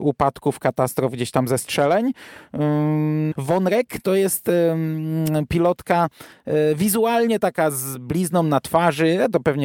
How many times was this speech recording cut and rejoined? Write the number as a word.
one